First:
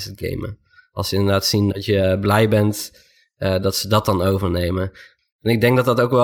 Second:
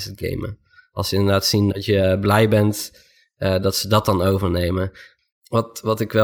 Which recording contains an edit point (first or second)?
second